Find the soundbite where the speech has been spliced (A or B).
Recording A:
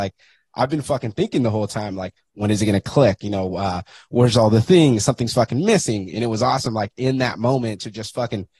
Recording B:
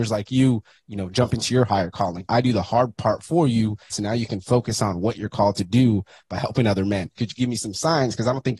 B